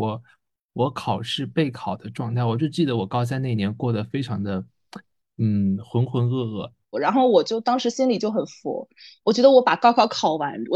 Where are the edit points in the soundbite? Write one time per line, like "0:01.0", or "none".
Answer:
0:06.9

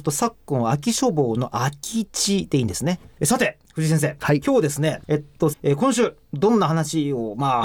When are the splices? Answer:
0:03.2
0:05.5

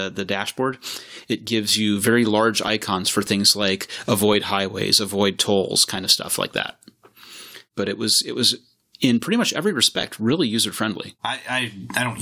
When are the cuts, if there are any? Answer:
0:11.2

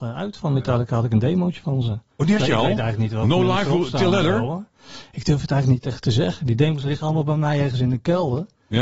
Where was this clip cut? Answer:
none

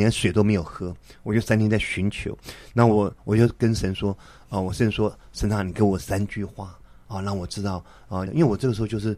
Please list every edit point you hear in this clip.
0:08.3

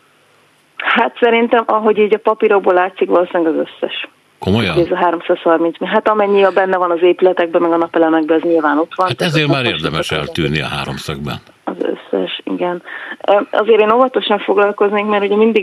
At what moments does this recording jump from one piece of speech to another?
none

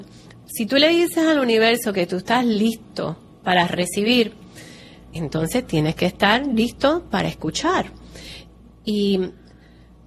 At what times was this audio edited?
0:05.2

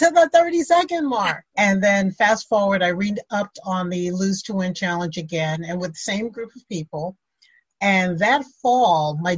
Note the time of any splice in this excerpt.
0:01.4

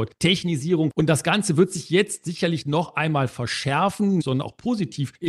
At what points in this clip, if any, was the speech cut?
0:04.2

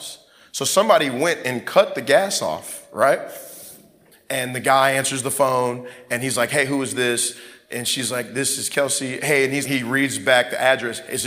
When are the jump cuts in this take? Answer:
0:04.1
0:09.6

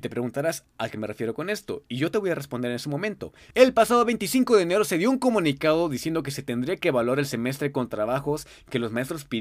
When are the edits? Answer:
none

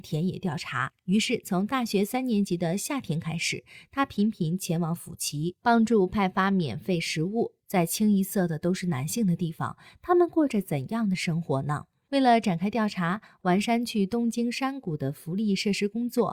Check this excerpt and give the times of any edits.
0:07.6

